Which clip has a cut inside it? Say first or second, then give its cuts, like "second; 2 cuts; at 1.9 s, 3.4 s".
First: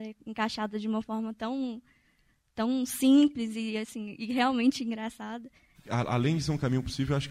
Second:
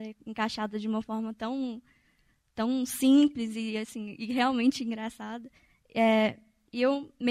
first; 1 cut; at 5.7 s